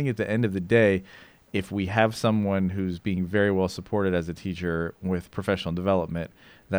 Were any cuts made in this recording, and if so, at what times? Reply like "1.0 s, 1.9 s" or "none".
none